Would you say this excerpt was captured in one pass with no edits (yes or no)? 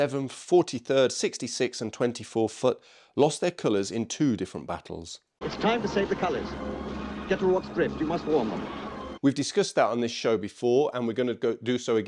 no